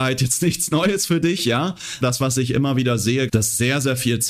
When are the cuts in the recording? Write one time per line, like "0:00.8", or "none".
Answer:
0:02.0
0:03.3